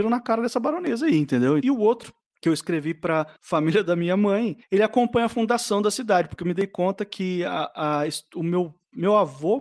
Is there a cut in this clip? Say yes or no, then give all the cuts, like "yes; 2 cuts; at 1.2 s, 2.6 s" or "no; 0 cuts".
yes; 1 cut; at 1.6 s